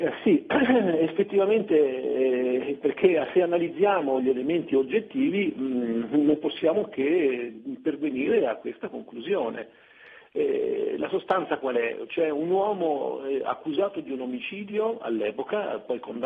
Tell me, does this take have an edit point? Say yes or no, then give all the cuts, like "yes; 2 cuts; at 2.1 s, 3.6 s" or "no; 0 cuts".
yes; 1 cut; at 2.8 s